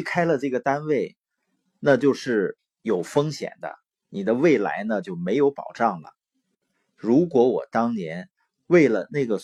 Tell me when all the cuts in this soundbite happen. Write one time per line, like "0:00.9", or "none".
0:06.7